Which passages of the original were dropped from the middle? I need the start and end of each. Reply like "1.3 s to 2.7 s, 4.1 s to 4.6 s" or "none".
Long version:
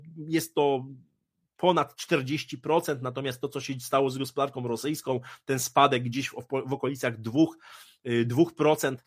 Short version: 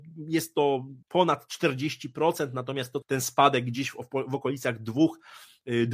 1.0 s to 1.5 s, 3.5 s to 5.4 s